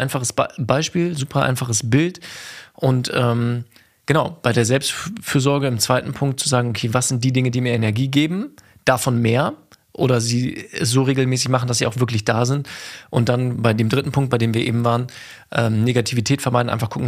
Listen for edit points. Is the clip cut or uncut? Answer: uncut